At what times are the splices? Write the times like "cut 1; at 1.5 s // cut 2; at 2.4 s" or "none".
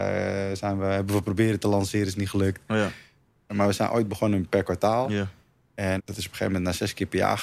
cut 1; at 3.5 s // cut 2; at 6.0 s